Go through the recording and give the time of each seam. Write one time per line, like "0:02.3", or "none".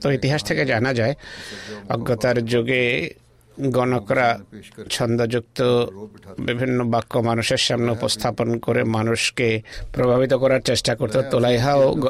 none

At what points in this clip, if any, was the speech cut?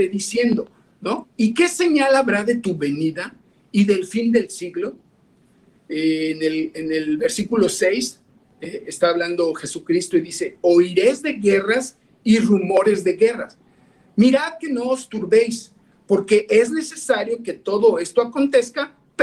0:01.2

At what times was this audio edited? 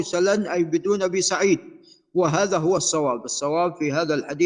none

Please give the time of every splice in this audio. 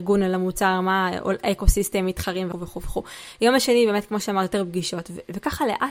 0:02.5

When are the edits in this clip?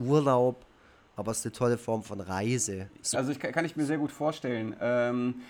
0:03.1

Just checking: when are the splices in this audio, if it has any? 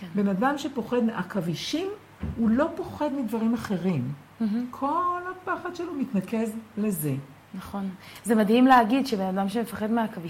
none

